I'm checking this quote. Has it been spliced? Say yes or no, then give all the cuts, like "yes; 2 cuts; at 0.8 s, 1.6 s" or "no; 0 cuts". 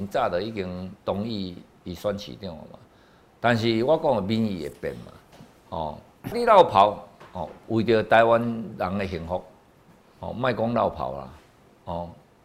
yes; 1 cut; at 6.3 s